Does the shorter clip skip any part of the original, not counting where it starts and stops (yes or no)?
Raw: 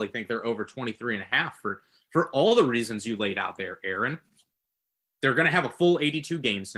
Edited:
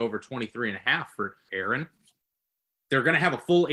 yes